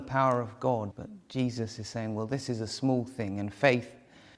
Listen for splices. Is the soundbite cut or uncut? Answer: cut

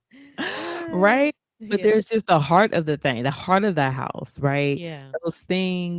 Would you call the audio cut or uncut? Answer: uncut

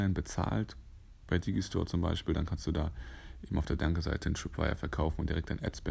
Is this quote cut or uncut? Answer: uncut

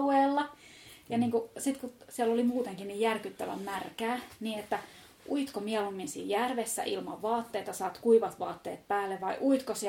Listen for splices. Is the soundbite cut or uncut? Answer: uncut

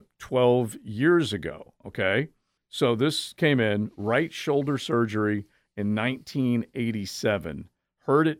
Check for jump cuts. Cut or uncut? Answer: cut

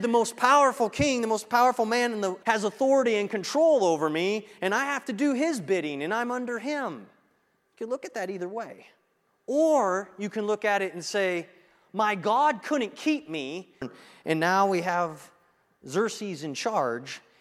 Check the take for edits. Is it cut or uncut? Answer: cut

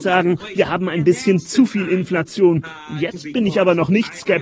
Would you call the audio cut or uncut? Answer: uncut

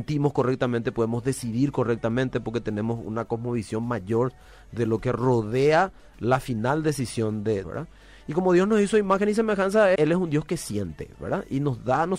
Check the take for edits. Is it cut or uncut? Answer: cut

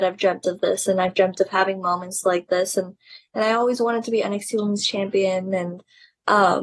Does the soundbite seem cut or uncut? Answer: uncut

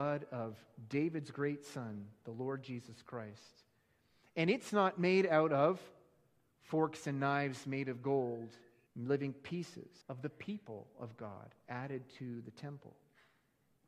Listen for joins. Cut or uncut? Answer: cut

